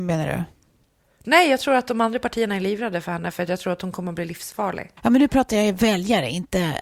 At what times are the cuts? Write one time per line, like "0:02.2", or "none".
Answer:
0:05.0